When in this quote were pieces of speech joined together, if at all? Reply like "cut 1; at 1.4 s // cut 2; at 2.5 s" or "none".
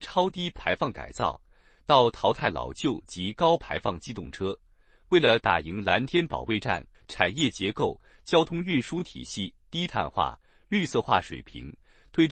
cut 1; at 6.9 s